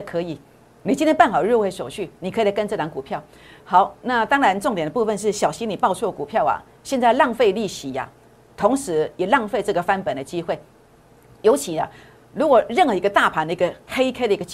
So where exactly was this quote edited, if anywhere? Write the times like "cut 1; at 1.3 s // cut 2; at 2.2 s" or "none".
none